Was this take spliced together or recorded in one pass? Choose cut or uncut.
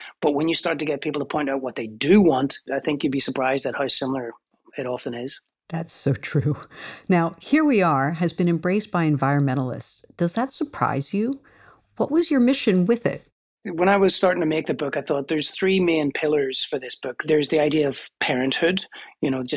uncut